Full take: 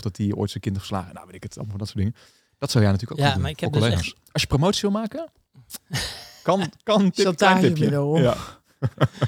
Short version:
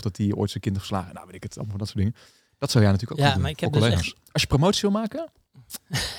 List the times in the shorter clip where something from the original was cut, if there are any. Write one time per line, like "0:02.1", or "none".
none